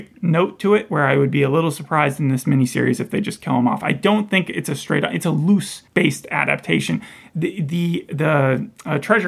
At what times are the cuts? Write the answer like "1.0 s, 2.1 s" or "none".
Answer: 5.9 s